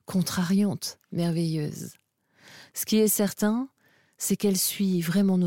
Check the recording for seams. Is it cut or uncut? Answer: uncut